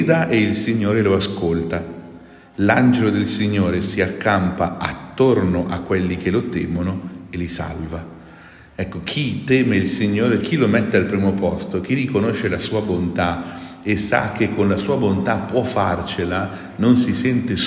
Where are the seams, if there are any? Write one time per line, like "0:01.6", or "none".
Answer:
0:10.4